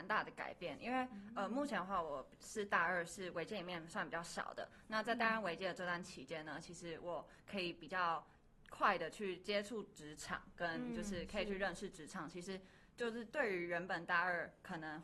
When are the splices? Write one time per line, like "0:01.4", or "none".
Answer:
none